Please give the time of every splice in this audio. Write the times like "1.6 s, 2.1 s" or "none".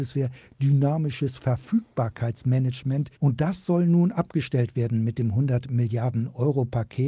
3.2 s